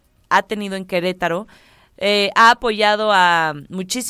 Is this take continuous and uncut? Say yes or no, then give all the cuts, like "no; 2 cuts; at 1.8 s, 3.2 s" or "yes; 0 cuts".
yes; 0 cuts